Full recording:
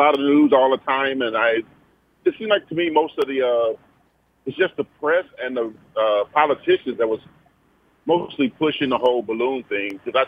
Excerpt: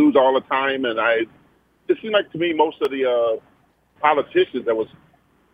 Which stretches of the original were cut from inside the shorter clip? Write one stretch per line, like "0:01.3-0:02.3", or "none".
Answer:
0:04.3-0:06.3